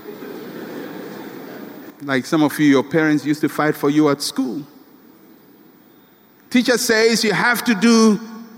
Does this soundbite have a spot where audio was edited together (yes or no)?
no